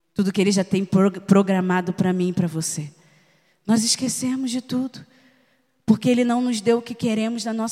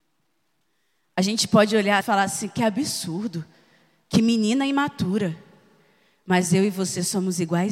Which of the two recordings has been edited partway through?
second; 1 cut; at 2.0 s

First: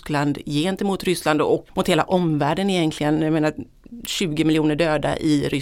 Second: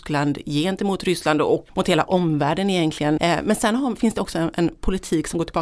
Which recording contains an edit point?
second; 1 cut; at 3.2 s

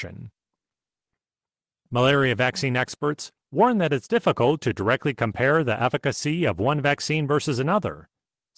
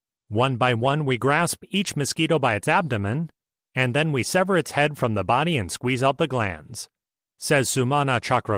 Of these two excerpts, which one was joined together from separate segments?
first; 1 cut; at 1.7 s

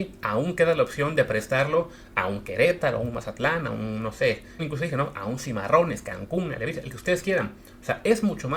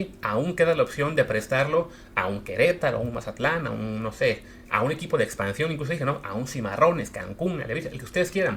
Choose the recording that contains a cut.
first; 1 cut; at 4.6 s

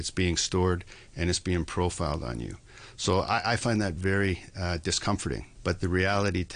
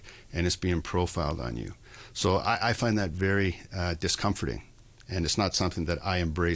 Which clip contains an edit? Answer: first; 1 cut; at 5.6 s

